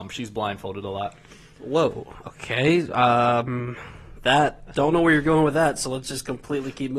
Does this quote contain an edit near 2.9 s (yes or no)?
no